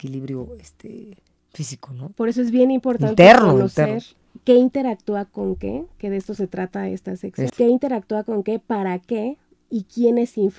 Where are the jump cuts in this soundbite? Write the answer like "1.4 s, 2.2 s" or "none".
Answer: 7.5 s